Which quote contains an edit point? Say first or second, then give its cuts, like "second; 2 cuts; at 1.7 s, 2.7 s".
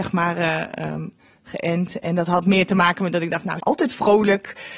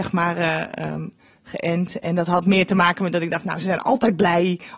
first; 1 cut; at 3.6 s